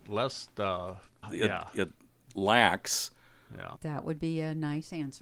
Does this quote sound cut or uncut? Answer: cut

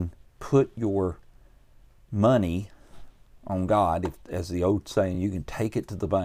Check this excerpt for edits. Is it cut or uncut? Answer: uncut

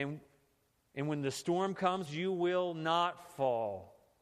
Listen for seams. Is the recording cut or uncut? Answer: cut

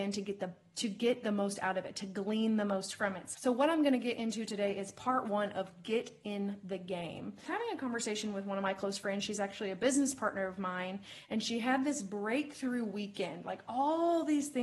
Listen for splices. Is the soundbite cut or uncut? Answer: uncut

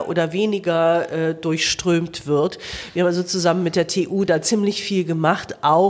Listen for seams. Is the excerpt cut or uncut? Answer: uncut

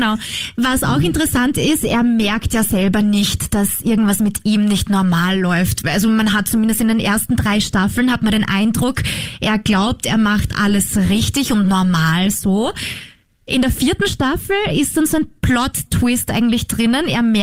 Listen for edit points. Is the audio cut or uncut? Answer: uncut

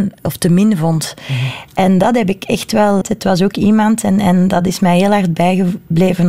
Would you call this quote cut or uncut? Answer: cut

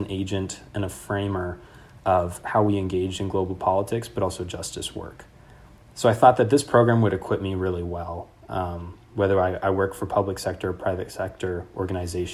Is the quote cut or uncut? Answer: uncut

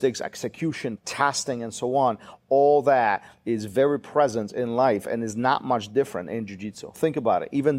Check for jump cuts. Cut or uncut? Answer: cut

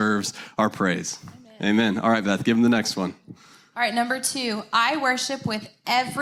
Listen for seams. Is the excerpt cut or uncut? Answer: uncut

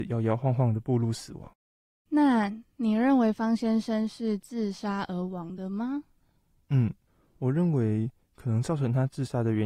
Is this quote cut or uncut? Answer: uncut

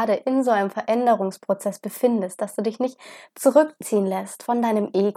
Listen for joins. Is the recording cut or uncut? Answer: uncut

